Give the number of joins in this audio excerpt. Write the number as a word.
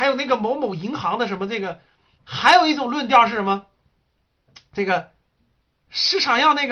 one